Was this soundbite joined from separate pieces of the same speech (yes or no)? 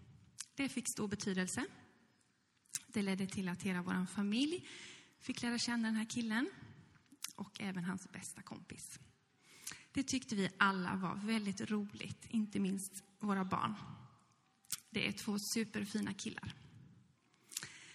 no